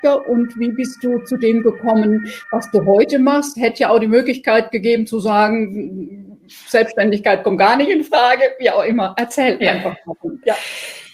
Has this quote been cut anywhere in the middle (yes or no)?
no